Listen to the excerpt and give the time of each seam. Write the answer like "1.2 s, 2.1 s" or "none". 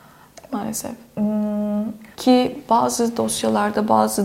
2.1 s